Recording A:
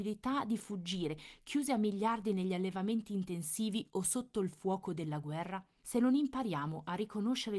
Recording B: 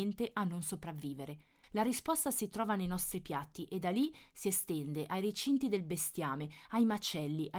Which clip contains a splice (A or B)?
A